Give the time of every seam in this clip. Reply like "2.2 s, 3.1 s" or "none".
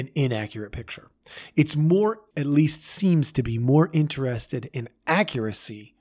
2.3 s